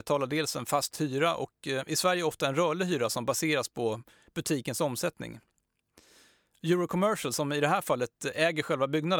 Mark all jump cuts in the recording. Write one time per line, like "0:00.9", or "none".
none